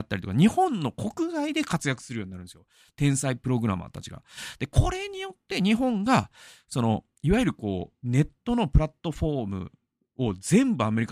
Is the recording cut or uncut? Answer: uncut